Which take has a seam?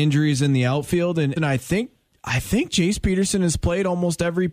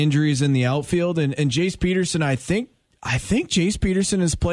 first; 1 cut; at 1.4 s

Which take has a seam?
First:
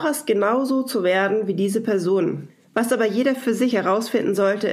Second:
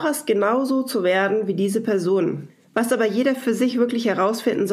first; 1 cut; at 3.7 s

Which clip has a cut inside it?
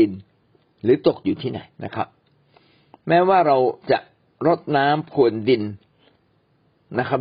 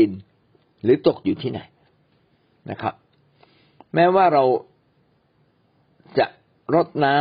first; 2 cuts; at 1.7 s, 3.8 s

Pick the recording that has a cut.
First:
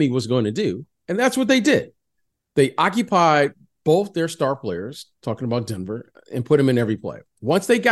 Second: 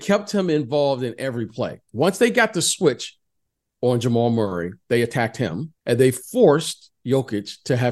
second; 2 cuts; at 1.8 s, 5.8 s

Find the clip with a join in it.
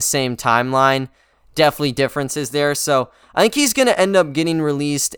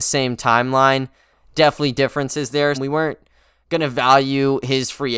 second; 1 cut; at 2.7 s

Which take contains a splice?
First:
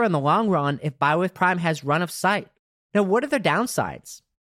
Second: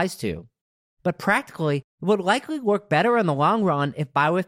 first; 1 cut; at 2.8 s

